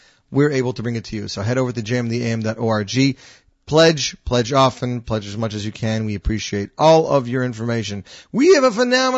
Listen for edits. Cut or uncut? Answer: uncut